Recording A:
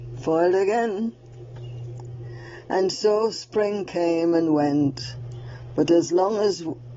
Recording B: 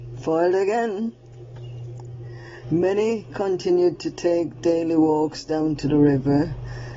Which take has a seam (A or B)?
B